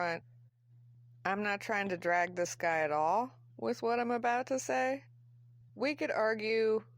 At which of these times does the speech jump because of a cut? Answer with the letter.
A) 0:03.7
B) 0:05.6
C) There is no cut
B